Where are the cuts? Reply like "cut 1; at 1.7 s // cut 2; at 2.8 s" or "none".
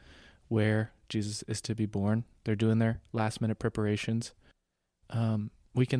none